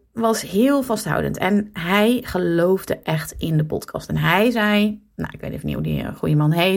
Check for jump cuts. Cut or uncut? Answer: uncut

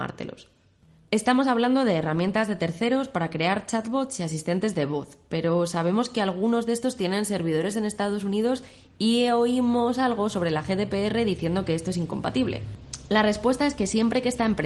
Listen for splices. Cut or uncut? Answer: cut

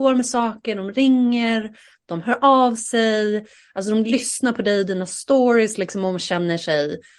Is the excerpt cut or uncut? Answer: uncut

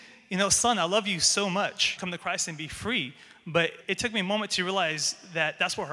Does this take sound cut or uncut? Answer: cut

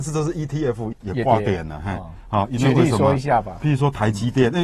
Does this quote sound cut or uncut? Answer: cut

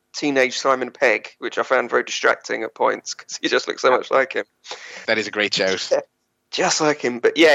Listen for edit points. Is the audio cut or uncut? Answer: cut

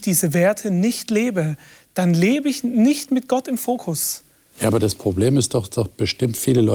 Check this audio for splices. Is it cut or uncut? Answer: uncut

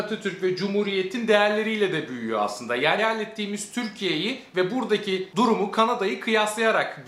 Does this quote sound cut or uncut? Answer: cut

